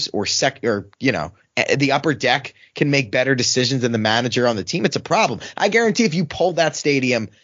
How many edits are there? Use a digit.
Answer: 0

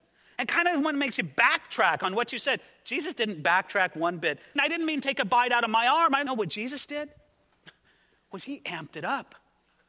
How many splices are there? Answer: 2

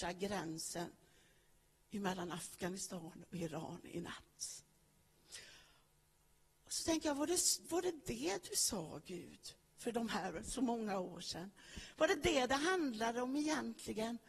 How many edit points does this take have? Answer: 0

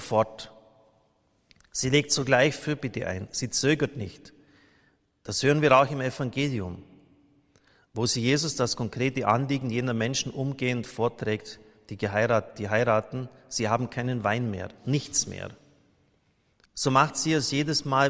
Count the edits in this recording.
0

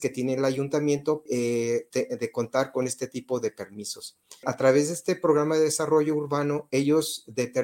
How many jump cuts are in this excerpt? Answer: 2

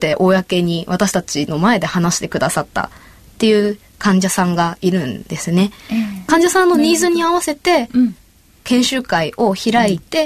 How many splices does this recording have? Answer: 0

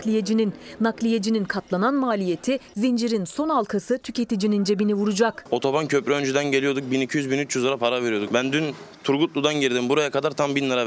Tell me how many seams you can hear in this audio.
0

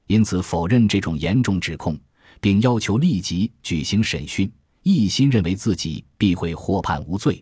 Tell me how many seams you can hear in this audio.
0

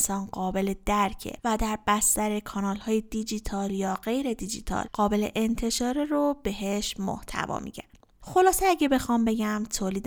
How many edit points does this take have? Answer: 0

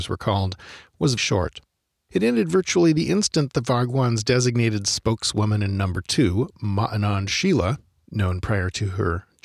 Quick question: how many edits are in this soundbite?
1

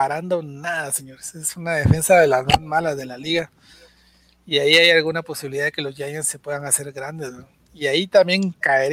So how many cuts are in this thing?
0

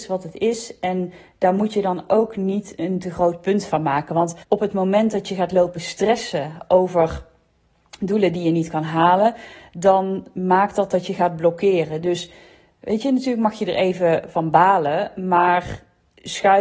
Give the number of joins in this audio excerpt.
1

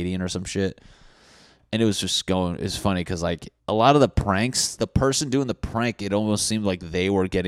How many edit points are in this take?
2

